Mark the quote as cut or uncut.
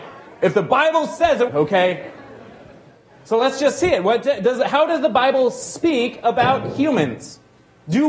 cut